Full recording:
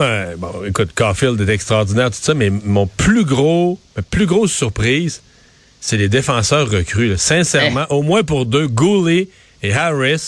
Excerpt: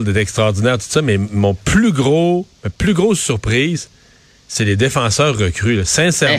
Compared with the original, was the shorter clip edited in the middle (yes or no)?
no